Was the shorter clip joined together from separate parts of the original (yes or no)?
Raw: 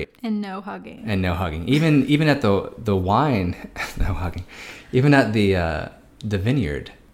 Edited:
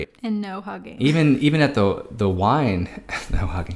yes